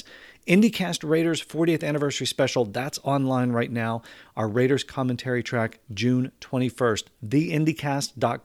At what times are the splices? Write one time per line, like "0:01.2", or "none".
none

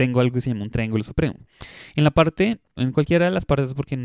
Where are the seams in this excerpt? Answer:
0:02.8

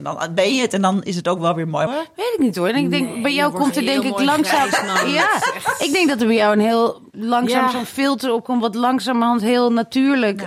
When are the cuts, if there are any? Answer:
0:01.9

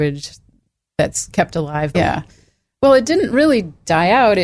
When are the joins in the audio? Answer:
0:01.9

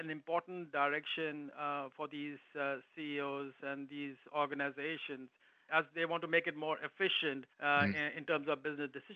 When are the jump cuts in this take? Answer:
0:05.7
0:07.5

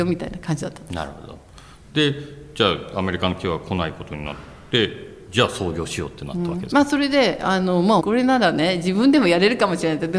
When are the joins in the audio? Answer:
0:08.0

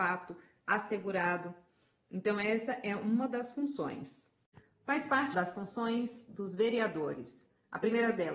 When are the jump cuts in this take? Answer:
0:05.3

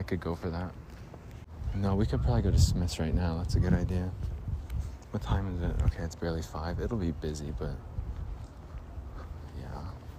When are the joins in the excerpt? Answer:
none

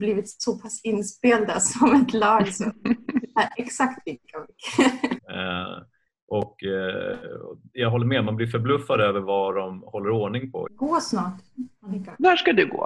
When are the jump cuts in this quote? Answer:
0:05.2
0:10.7

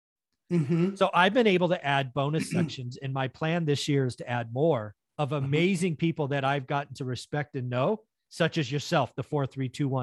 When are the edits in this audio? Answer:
none

